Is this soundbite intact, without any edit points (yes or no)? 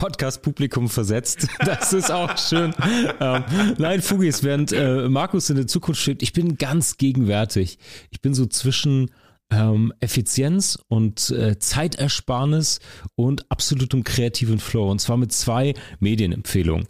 yes